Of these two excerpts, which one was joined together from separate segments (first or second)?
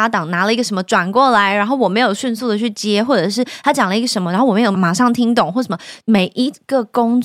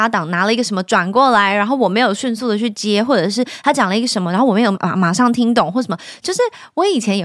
first